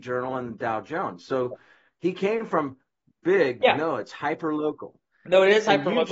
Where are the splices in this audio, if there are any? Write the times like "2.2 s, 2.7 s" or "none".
3.6 s